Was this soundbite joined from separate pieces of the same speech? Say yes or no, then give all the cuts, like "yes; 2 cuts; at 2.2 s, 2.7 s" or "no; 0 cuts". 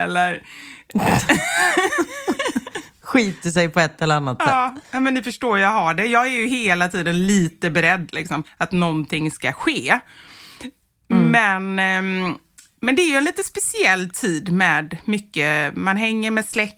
yes; 1 cut; at 8.4 s